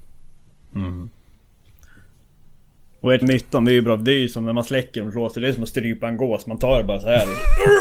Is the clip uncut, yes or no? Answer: no